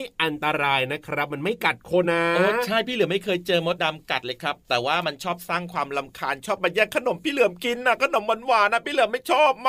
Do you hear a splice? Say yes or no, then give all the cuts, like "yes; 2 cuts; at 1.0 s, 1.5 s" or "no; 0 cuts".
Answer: yes; 2 cuts; at 2.0 s, 3.8 s